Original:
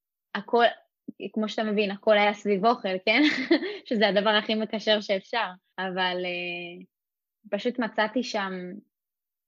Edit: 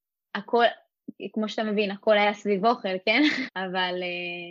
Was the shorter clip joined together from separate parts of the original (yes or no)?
yes